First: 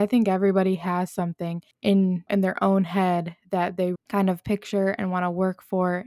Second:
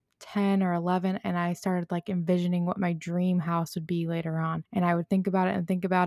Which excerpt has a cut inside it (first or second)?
first